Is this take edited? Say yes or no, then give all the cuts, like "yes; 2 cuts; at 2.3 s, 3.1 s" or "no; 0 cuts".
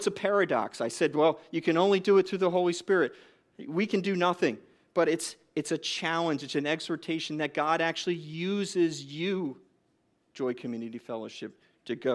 no; 0 cuts